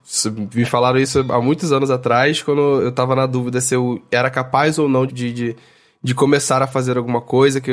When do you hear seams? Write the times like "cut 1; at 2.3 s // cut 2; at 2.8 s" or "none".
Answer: cut 1; at 5.1 s

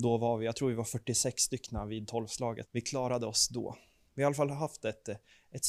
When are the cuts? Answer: cut 1; at 2.6 s

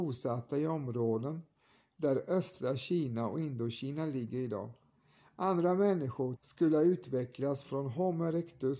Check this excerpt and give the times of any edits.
cut 1; at 6.4 s

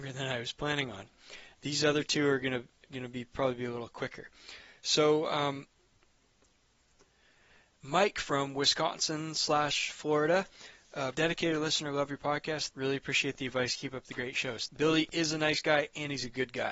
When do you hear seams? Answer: cut 1; at 11.1 s // cut 2; at 12.7 s // cut 3; at 14.7 s

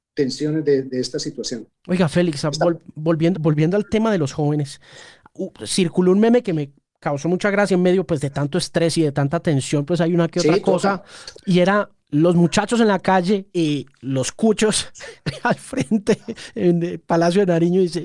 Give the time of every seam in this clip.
cut 1; at 3.3 s // cut 2; at 11.3 s // cut 3; at 13.5 s

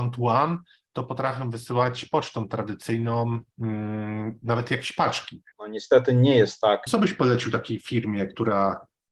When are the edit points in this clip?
cut 1; at 5.5 s // cut 2; at 6.9 s

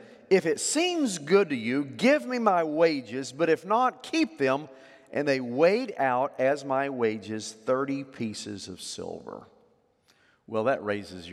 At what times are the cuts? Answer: none

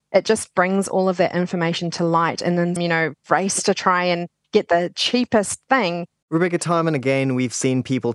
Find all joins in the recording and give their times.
cut 1; at 2.8 s // cut 2; at 6.2 s

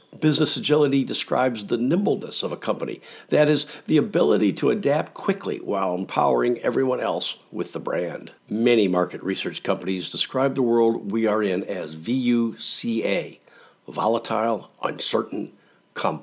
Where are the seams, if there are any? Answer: cut 1; at 8.4 s

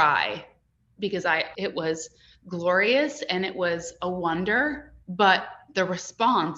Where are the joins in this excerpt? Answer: cut 1; at 1.5 s // cut 2; at 5.0 s

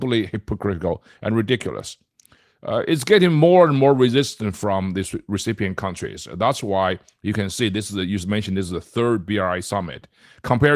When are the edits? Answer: none

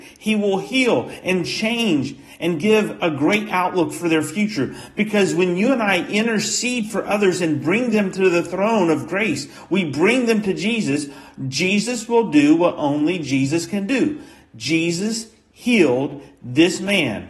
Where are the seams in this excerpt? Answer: none

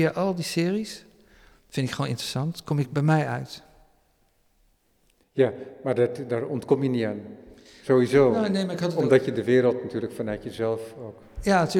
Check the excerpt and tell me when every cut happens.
none

